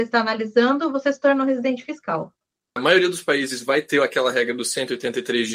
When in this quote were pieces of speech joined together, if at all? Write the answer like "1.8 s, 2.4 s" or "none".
2.8 s